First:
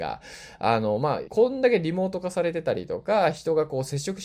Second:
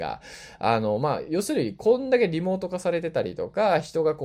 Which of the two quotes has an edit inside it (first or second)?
first